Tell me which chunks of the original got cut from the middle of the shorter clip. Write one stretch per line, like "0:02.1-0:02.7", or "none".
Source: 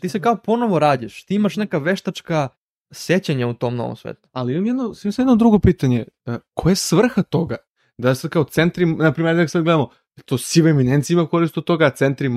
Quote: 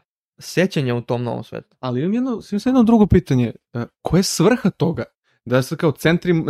none